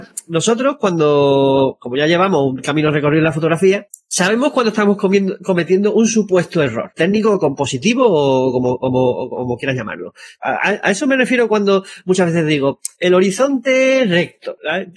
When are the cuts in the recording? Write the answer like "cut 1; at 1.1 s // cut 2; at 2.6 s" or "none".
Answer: cut 1; at 10.4 s